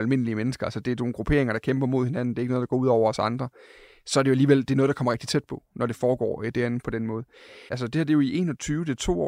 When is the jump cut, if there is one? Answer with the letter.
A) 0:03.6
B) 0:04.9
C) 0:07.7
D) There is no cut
C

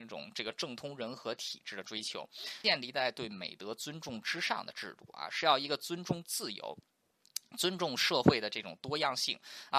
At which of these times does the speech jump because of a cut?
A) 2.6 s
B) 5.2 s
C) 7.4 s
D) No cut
A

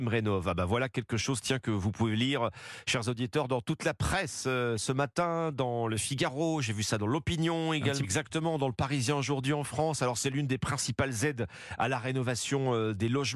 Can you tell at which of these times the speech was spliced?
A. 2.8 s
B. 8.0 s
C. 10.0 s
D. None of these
B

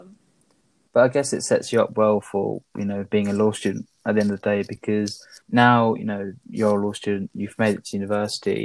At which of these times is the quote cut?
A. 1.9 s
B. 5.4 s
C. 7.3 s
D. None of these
B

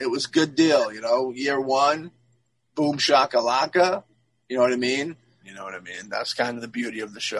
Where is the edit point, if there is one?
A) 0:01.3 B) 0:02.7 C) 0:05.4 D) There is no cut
C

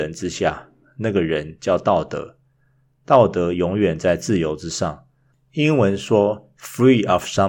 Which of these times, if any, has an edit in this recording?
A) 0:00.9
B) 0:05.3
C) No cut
B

